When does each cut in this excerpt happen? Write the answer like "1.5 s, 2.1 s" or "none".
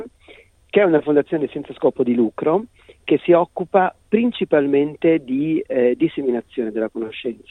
none